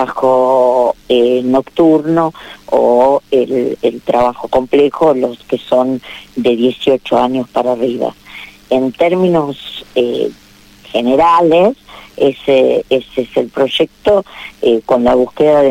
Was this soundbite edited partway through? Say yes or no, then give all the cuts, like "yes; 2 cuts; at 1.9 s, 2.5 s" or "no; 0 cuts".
no; 0 cuts